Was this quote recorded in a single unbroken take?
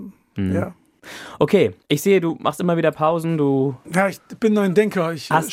no; 1 cut; at 1.8 s

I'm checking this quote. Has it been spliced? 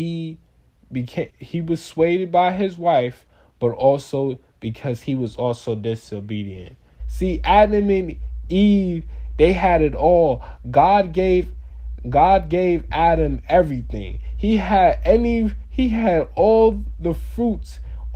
yes; 2 cuts; at 1.3 s, 7.0 s

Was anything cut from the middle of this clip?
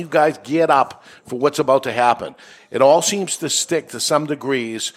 no; 0 cuts

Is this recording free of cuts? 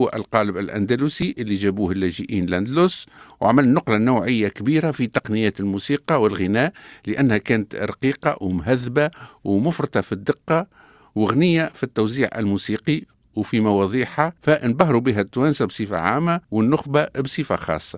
no; 2 cuts; at 14.4 s, 16.4 s

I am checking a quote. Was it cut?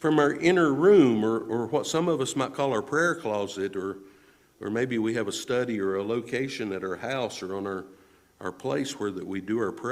no; 0 cuts

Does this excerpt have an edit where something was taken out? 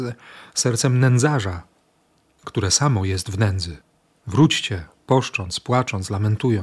no; 0 cuts

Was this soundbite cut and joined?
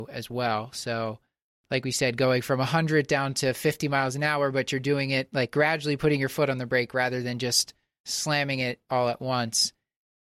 no; 0 cuts

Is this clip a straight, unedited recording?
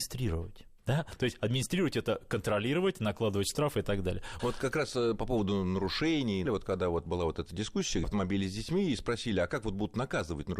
no; 3 cuts; at 4.4 s, 6.5 s, 8.0 s

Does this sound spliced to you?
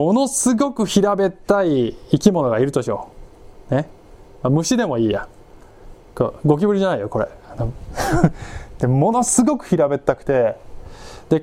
no; 0 cuts

